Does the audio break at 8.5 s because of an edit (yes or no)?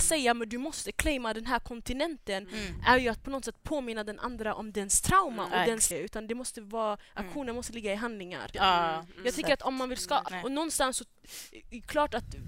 yes